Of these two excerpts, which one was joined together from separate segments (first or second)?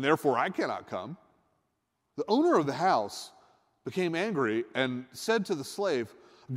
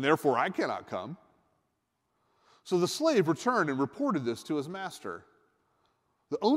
first